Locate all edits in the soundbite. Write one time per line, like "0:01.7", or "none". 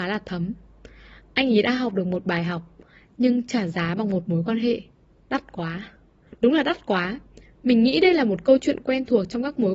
0:06.3